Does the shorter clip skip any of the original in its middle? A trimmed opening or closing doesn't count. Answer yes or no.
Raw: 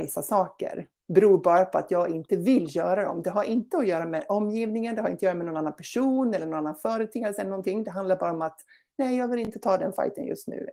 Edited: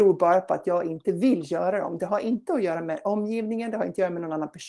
no